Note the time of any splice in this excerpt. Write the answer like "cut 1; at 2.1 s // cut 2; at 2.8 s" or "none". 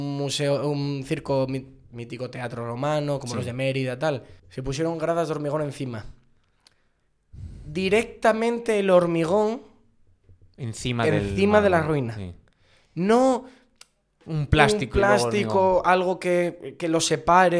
cut 1; at 4.4 s